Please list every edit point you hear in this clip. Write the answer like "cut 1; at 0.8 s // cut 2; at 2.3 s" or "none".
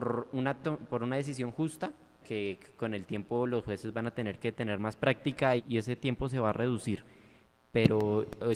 cut 1; at 2.2 s // cut 2; at 5.6 s